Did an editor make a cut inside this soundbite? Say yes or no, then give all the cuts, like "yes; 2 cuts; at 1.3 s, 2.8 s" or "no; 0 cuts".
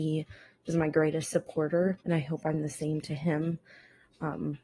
yes; 1 cut; at 2.0 s